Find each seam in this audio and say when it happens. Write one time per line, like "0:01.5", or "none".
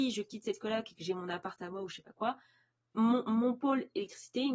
none